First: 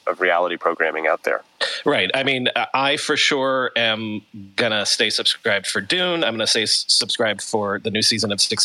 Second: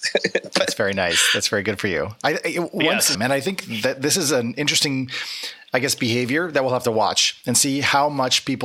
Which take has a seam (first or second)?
second